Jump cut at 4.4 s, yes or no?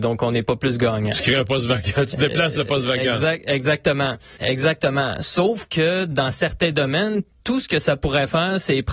yes